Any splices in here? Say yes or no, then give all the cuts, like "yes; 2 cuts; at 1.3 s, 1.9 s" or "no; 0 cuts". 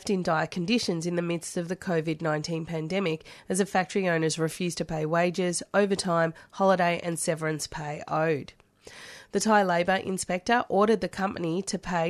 no; 0 cuts